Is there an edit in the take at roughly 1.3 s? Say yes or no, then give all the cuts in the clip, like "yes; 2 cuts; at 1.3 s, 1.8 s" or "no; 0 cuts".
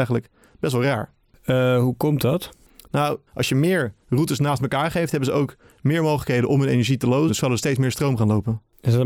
no; 2 cuts; at 3.3 s, 7.3 s